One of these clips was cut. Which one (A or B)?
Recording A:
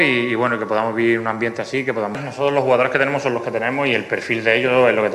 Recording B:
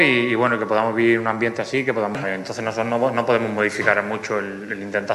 B